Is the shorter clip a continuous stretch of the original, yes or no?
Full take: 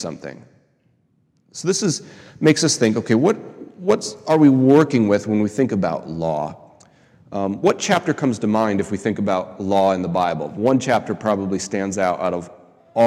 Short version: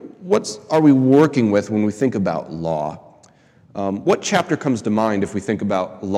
yes